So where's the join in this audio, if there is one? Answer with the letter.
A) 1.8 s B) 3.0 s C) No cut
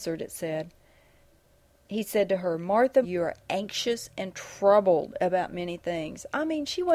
B